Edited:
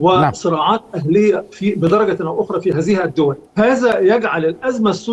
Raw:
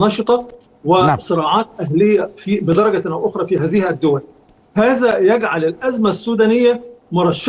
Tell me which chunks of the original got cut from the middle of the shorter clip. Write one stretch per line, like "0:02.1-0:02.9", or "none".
0:04.3-0:04.7